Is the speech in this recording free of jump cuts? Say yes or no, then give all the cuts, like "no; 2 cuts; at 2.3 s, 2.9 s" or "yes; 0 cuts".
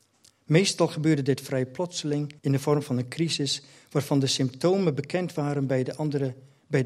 no; 1 cut; at 2.4 s